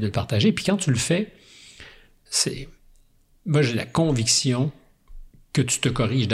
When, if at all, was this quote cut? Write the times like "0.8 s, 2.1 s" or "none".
2.3 s